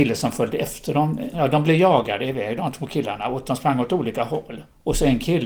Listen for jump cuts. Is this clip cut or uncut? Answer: cut